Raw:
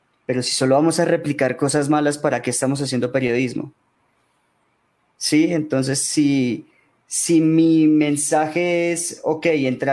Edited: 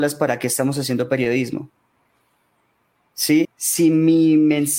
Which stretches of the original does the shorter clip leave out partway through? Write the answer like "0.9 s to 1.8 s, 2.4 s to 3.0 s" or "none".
5.5 s to 6.9 s